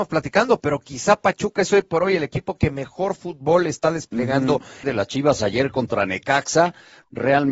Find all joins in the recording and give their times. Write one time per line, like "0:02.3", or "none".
0:04.8